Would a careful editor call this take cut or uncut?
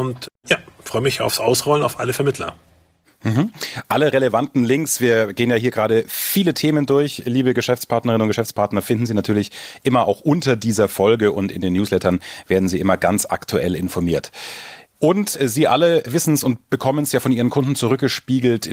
uncut